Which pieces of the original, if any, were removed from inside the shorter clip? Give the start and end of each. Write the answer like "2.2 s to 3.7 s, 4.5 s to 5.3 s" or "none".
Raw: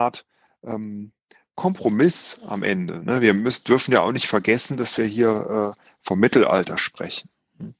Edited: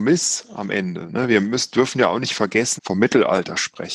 4.7 s to 6.0 s